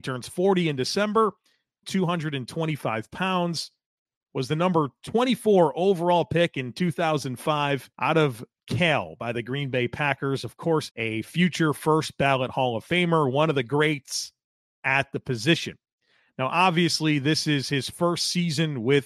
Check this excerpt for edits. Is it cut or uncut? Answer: cut